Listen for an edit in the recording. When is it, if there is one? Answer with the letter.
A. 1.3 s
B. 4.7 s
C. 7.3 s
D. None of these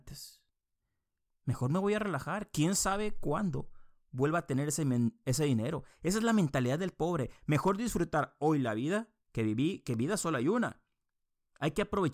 A